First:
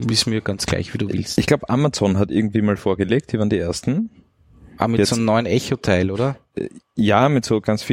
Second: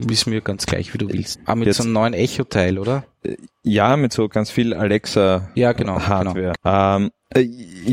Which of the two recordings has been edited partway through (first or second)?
second